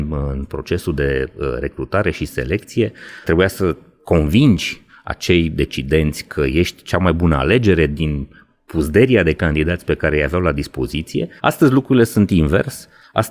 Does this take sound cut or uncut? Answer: cut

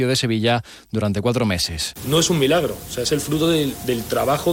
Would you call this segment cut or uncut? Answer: uncut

